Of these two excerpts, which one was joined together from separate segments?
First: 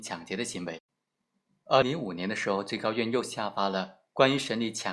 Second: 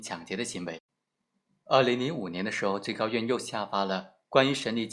first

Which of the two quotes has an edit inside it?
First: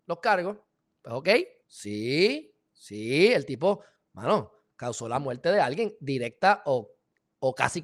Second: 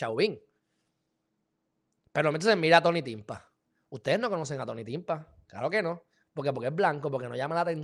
first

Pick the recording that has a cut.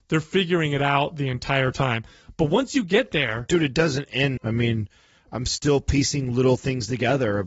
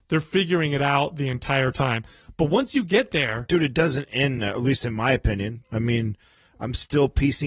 first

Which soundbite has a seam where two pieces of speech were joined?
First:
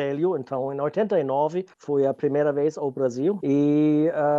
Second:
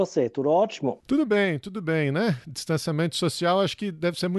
first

